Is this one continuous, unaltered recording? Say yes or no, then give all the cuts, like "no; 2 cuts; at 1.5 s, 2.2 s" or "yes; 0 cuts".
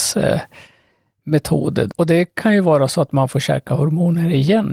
no; 1 cut; at 1.9 s